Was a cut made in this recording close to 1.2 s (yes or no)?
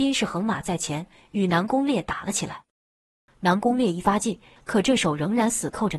no